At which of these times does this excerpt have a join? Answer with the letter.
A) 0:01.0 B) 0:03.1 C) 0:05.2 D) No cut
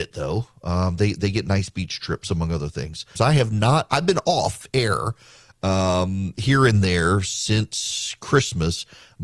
B